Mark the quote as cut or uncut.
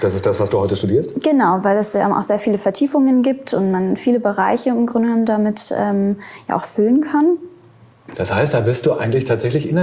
cut